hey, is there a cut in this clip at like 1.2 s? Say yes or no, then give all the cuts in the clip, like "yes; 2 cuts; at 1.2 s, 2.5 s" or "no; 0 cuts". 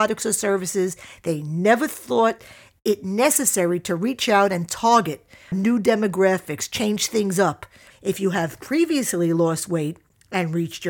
no; 2 cuts; at 5.5 s, 7.9 s